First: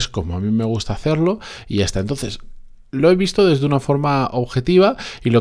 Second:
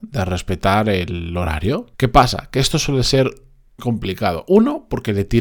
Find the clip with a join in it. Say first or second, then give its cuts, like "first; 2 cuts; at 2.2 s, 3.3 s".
second; 2 cuts; at 1.9 s, 3.8 s